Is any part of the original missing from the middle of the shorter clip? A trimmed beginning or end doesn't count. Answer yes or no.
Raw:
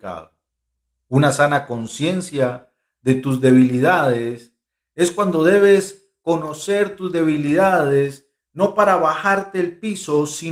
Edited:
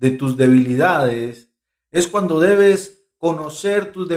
no